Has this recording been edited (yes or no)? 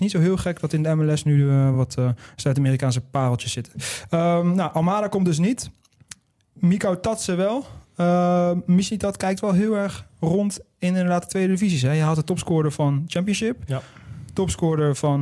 no